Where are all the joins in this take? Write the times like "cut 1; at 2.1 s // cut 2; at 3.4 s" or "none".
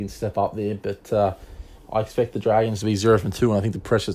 none